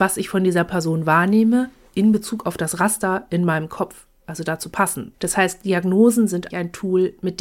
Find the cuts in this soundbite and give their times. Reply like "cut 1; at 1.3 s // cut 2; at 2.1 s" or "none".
cut 1; at 5.1 s // cut 2; at 6.5 s